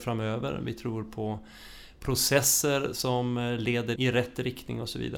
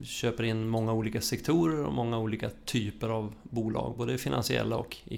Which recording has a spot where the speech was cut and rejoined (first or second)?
first